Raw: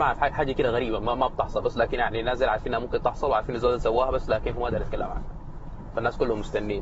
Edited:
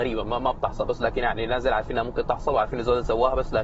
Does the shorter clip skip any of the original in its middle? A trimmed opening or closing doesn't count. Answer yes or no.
no